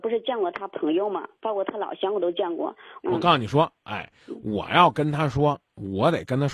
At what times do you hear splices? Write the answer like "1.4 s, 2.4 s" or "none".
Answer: 3.0 s